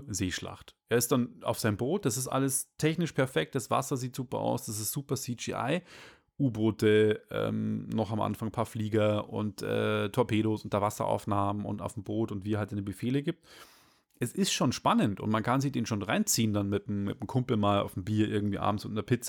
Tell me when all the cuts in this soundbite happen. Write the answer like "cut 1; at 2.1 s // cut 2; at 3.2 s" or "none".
none